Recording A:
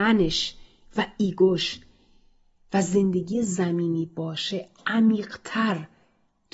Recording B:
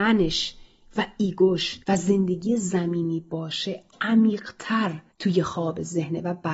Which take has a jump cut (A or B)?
B